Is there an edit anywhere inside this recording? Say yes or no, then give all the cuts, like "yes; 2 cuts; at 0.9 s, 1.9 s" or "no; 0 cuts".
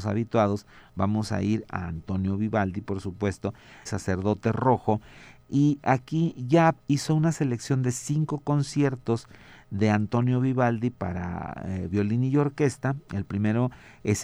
yes; 1 cut; at 3.9 s